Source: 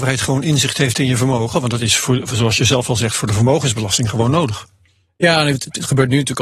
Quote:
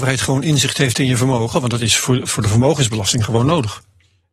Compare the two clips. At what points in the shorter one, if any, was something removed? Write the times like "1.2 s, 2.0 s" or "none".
2.3 s

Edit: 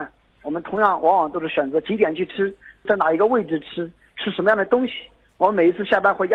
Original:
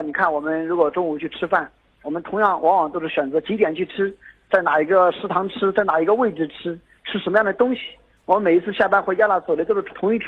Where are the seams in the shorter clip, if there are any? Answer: 2.9 s

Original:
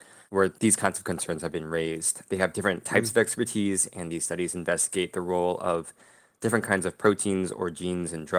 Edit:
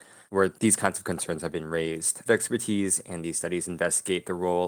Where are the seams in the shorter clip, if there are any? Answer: 2.3 s

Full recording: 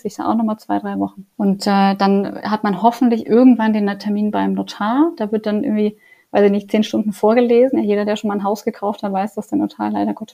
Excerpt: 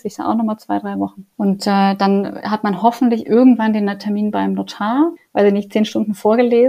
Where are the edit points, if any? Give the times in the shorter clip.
5.2 s

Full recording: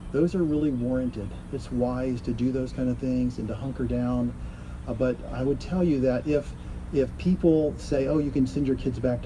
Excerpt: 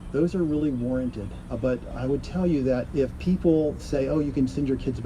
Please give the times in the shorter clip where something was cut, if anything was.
1.5 s, 2.9 s

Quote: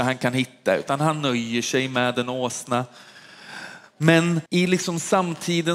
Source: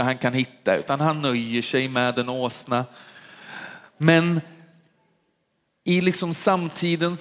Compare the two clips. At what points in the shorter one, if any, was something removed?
4.5 s

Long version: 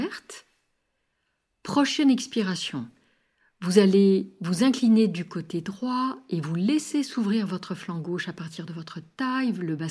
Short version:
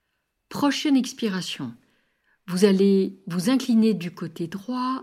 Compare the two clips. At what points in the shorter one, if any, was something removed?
none

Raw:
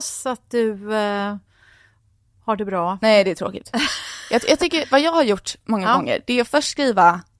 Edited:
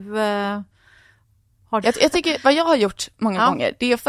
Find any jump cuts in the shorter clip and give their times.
1.8 s

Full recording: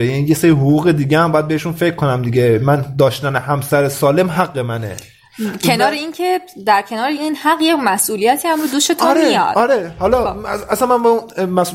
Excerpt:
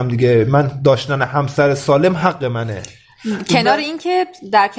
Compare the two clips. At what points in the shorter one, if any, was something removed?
none

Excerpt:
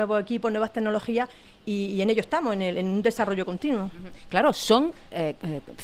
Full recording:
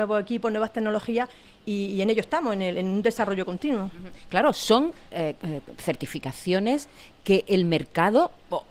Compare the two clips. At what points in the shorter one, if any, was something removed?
none

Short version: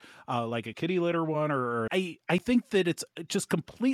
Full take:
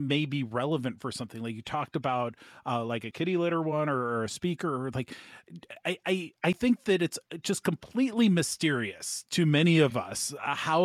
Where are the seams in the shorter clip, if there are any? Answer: 1.9 s

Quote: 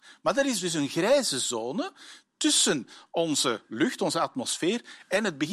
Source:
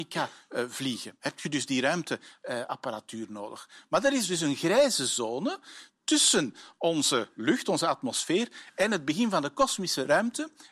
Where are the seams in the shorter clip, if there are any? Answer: none

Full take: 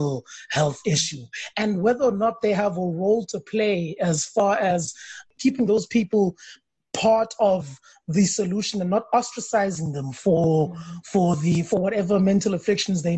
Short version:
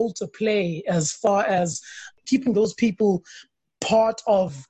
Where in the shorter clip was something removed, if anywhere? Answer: none

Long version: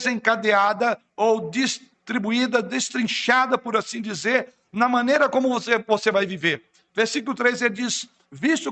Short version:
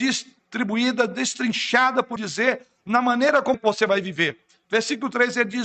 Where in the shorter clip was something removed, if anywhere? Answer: 2.2 s, 3.5 s

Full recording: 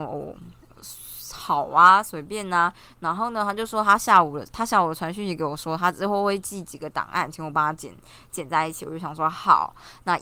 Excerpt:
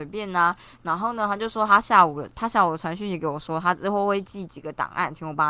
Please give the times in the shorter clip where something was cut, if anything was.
none

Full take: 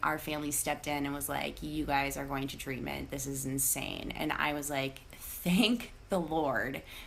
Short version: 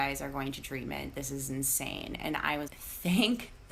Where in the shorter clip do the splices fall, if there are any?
2.7 s

